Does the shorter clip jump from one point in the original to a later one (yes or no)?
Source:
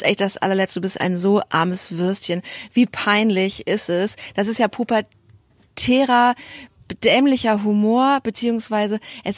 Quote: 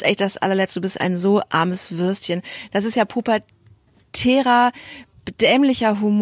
yes